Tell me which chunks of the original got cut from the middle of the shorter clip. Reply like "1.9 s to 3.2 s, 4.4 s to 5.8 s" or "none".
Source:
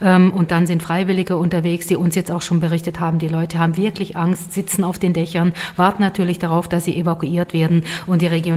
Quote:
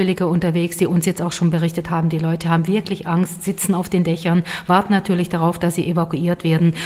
none